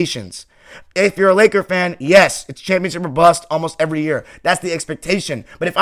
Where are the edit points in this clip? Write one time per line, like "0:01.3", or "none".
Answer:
none